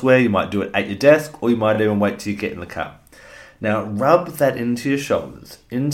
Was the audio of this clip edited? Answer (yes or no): no